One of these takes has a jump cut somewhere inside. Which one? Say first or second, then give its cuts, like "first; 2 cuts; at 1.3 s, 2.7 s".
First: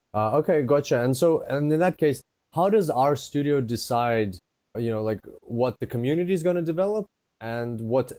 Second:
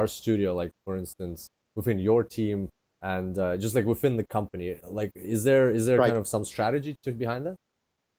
first; 1 cut; at 4.7 s